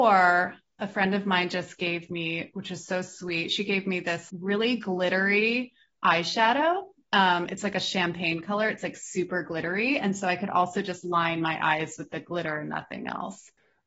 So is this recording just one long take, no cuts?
no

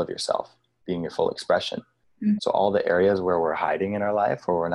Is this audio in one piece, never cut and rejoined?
no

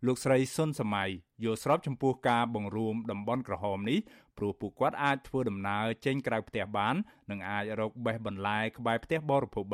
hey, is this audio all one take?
yes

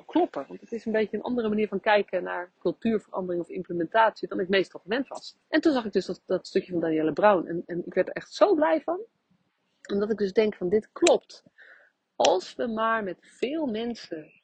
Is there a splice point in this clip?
yes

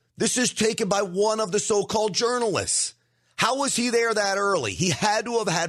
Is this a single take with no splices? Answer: yes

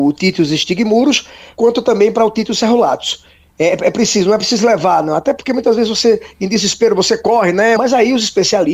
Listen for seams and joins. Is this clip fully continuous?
no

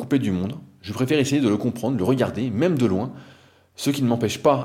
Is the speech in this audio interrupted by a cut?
no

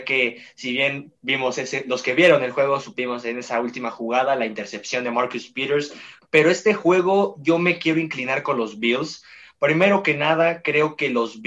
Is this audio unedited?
no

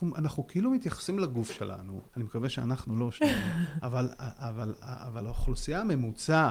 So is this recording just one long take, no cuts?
no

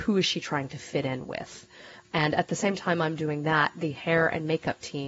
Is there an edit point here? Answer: yes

